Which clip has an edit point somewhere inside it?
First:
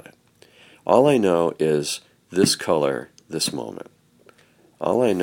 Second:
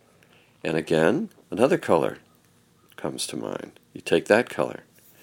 second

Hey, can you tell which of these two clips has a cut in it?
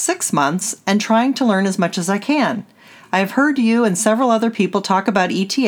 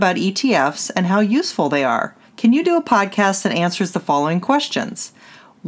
second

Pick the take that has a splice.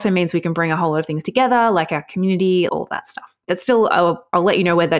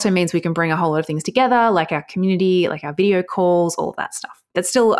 first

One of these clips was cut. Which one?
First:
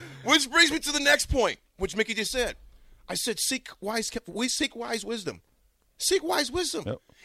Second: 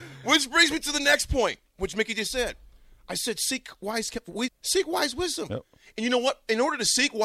second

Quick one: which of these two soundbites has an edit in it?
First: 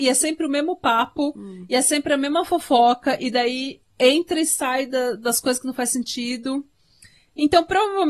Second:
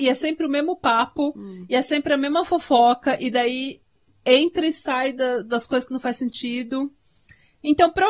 first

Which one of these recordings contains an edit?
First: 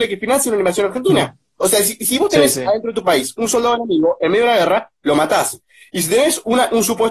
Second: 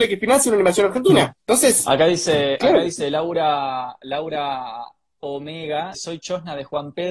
second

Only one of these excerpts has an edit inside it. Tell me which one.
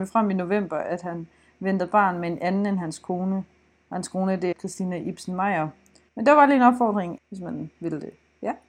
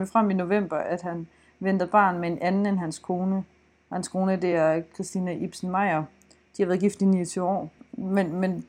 first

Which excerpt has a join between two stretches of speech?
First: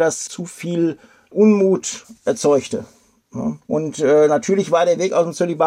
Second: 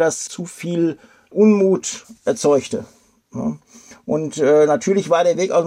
first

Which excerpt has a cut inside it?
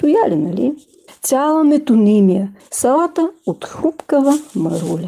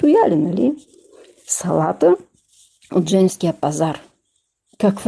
first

